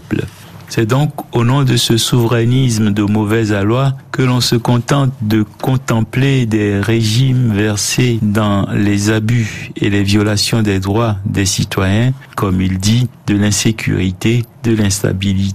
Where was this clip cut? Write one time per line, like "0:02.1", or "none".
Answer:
0:12.3